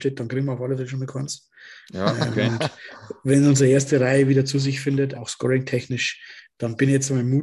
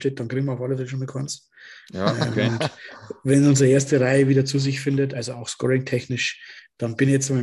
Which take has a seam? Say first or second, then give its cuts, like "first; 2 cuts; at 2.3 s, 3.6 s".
first; 1 cut; at 5.1 s